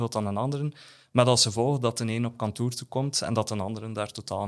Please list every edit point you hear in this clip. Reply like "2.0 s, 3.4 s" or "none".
none